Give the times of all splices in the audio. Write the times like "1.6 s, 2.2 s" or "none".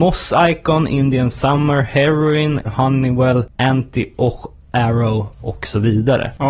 2.6 s